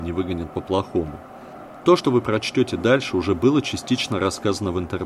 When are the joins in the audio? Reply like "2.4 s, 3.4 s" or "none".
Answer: none